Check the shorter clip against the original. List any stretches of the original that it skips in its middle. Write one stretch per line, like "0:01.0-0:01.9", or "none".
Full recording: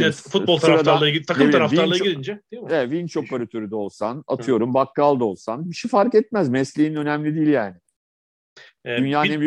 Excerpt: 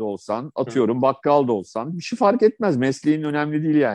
none